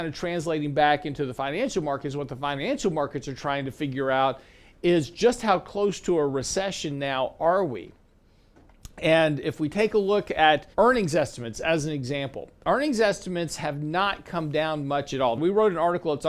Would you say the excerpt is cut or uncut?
cut